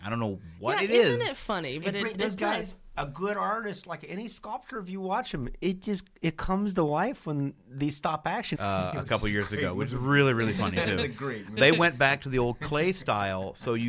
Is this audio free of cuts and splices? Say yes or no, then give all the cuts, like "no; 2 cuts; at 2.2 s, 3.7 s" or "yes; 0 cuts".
no; 2 cuts; at 8.5 s, 11.6 s